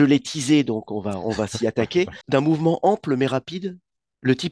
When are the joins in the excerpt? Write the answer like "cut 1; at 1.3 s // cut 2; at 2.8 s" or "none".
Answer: cut 1; at 2.2 s